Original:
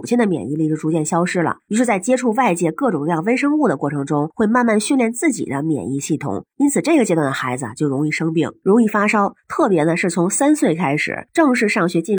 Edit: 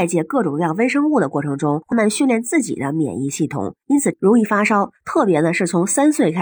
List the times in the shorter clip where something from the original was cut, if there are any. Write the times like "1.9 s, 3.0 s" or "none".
1.9 s, 4.1 s